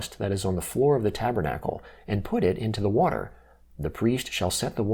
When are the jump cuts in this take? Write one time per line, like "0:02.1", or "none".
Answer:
none